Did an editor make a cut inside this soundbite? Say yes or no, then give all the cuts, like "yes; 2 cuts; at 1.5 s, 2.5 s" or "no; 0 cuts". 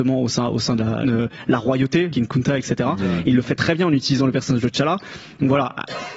yes; 2 cuts; at 1.0 s, 2.1 s